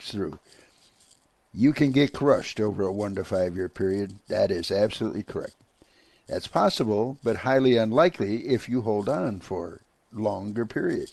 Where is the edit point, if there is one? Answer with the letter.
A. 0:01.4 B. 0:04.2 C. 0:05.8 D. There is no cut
D